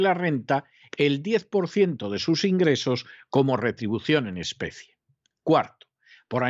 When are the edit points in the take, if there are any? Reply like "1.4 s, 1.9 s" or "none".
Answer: none